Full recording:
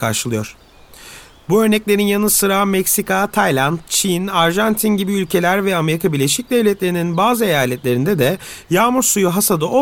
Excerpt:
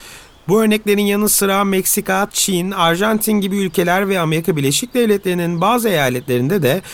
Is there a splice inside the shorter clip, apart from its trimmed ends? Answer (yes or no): yes